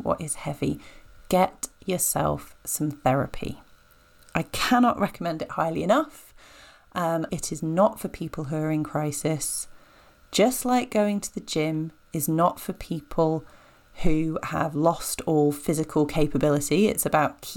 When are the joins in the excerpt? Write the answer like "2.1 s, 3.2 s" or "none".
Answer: 7.3 s